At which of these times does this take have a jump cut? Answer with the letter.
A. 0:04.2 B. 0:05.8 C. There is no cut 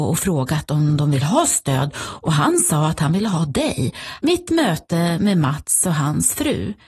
A